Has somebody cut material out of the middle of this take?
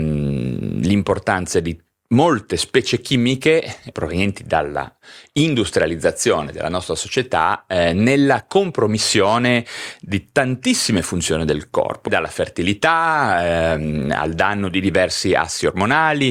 yes; 2 cuts; at 3.9 s, 12.1 s

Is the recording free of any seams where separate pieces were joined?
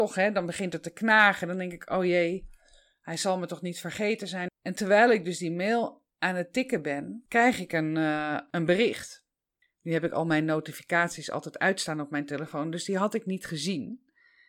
no; 1 cut; at 4.5 s

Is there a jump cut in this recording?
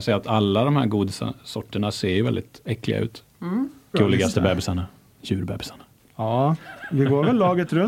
yes; 1 cut; at 3.9 s

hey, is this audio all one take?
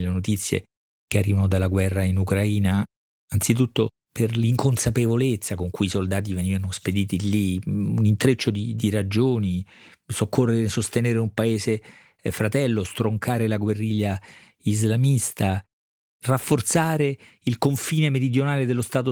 yes; 0 cuts

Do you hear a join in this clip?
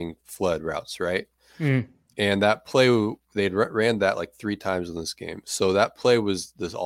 no; 0 cuts

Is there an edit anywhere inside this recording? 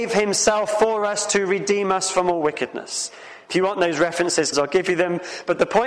yes; 1 cut; at 4.5 s

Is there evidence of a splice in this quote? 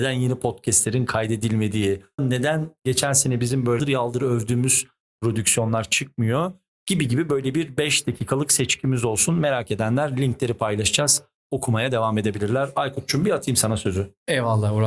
yes; 2 cuts; at 2.2 s, 3.8 s

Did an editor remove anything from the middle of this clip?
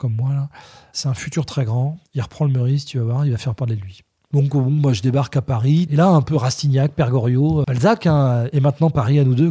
yes; 2 cuts; at 2.1 s, 7.6 s

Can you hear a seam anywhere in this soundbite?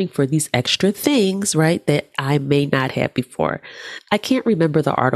no; 0 cuts

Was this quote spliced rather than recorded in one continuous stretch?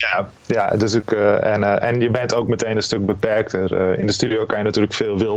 no; 0 cuts

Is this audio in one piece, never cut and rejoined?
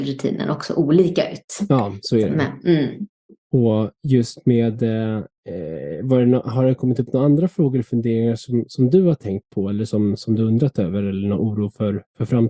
yes; 0 cuts

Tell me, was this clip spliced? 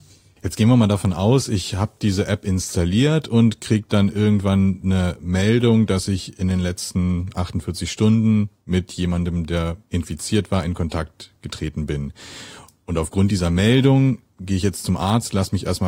no; 0 cuts

